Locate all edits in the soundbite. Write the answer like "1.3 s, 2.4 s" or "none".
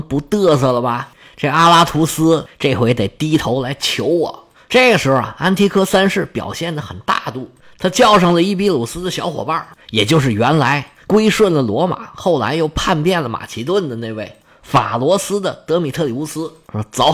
none